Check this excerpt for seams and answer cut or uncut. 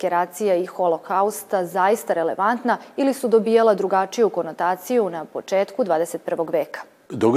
uncut